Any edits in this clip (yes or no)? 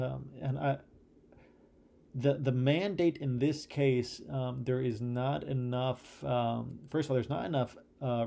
no